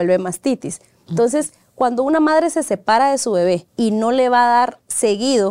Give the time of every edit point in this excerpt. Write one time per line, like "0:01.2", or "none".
0:03.7